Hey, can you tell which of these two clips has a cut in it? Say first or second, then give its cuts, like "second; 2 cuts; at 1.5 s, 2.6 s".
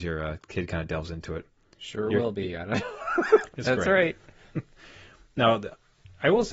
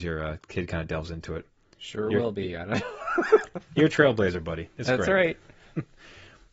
first; 1 cut; at 3.5 s